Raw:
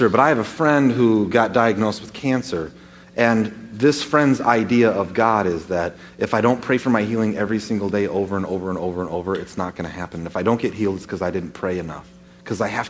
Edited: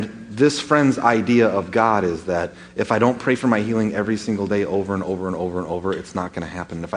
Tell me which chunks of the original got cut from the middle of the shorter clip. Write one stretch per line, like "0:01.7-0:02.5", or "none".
none